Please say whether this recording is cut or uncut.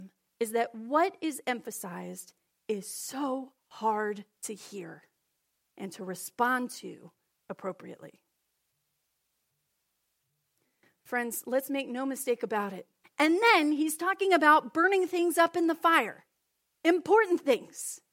cut